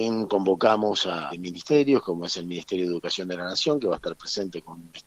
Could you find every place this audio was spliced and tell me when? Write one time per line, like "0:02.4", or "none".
0:01.3